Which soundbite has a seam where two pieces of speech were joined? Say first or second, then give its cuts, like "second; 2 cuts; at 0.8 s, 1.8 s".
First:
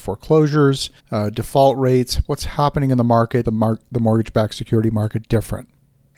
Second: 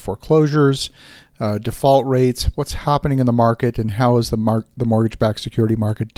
first; 2 cuts; at 1.0 s, 3.4 s